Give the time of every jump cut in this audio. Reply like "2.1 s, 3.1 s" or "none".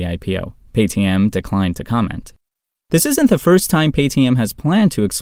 none